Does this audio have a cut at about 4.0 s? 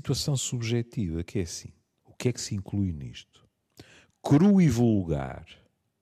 no; 1 cut; at 2.0 s

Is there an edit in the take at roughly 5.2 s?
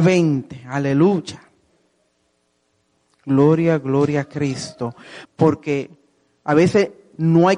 yes; 1 cut; at 5.2 s

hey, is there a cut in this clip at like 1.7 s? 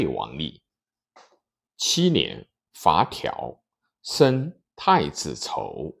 yes; 1 cut; at 1.7 s

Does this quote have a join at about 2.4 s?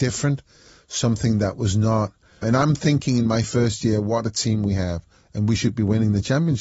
yes; 1 cut; at 2.4 s

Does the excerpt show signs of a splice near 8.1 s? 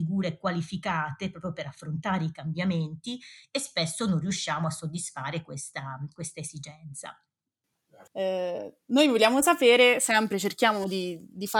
yes; 1 cut; at 8.1 s

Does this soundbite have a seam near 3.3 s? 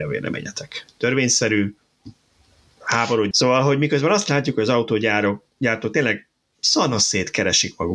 yes; 1 cut; at 3.3 s

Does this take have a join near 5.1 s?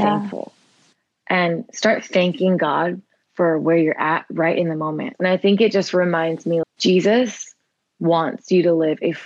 yes; 2 cuts; at 5.1 s, 6.6 s

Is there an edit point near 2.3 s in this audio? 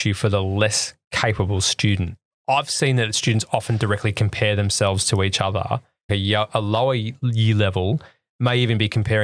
no; 1 cut; at 6.1 s

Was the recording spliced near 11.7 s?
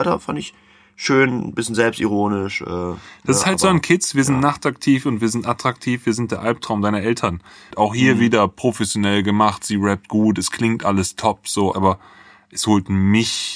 yes; 2 cuts; at 7.7 s, 11.7 s

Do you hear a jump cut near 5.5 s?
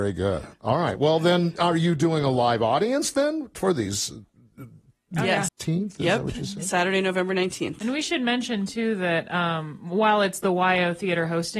yes; 1 cut; at 5.5 s

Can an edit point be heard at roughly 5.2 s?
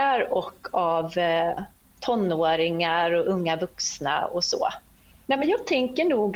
yes; 1 cut; at 5.2 s

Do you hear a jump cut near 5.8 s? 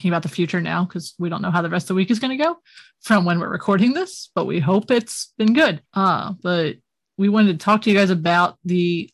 yes; 1 cut; at 5.8 s

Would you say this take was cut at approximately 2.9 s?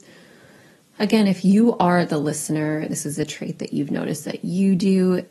yes; 1 cut; at 2.9 s

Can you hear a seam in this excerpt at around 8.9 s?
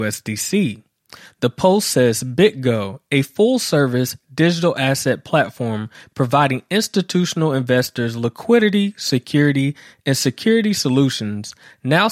no; 0 cuts

